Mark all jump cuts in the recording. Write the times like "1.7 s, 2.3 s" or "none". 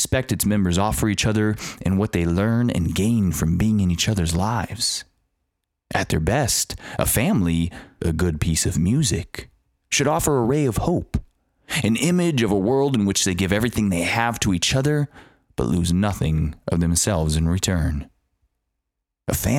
8.0 s